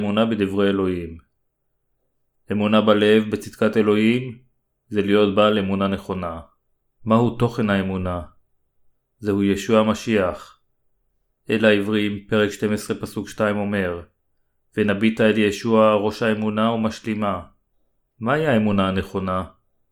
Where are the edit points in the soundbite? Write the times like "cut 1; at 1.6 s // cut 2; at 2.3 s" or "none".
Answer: cut 1; at 7.0 s // cut 2; at 18.0 s